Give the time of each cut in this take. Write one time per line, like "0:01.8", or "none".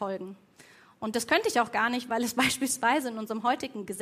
none